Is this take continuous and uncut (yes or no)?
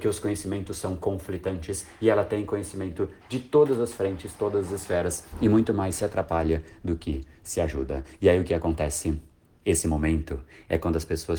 no